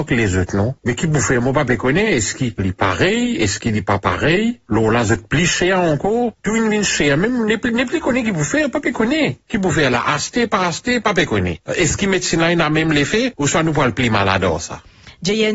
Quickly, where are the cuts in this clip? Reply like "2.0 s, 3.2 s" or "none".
2.6 s